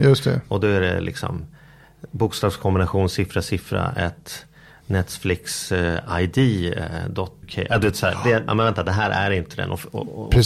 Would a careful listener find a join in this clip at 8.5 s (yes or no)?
yes